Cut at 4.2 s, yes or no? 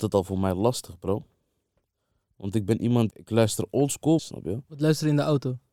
yes